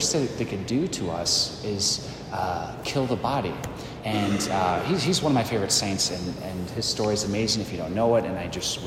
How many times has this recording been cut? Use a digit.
1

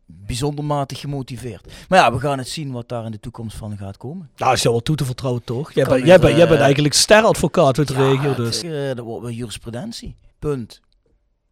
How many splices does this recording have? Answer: 2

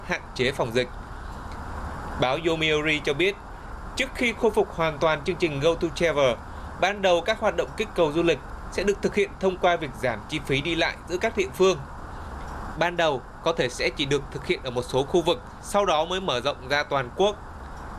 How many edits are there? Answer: 1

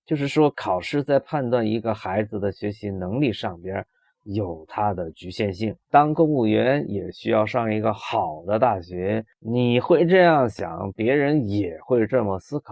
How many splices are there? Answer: 1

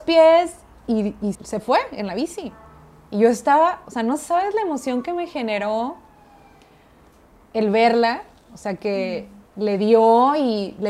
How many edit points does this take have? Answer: 1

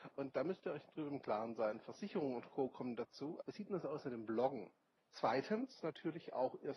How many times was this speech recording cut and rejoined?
2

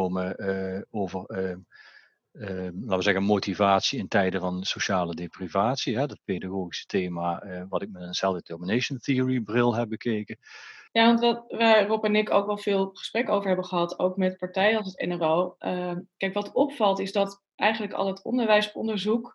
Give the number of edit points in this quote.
1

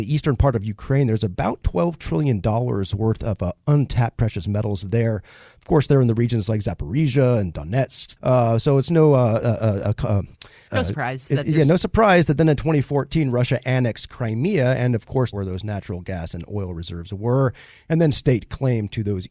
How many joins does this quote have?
3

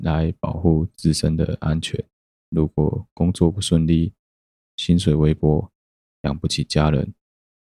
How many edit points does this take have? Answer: 1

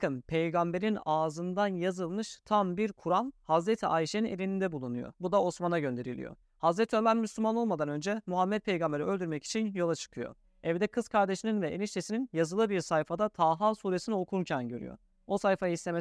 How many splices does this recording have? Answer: 2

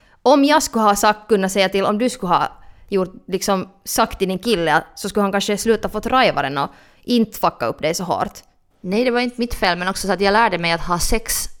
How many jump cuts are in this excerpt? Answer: 1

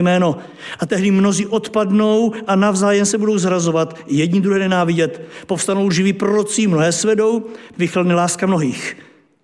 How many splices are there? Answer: 1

